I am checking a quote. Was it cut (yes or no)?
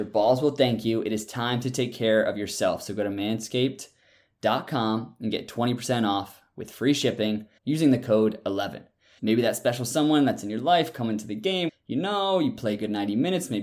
yes